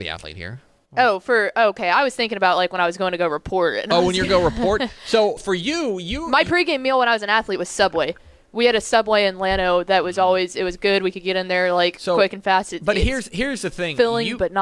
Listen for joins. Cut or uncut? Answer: cut